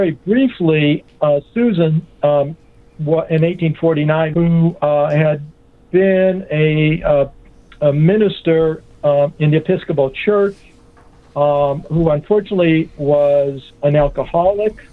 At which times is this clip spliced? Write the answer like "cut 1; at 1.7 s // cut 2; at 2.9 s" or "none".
cut 1; at 4.3 s